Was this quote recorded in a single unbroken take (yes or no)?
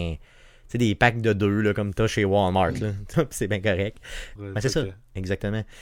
no